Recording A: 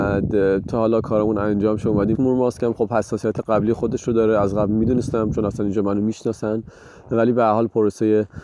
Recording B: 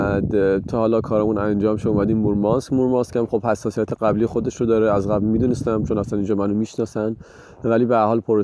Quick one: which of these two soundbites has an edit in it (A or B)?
A